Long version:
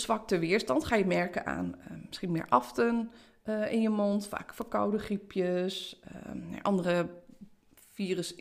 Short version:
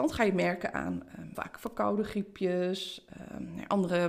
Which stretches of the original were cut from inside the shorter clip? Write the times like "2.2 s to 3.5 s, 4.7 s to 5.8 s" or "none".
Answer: 2.1 s to 4.3 s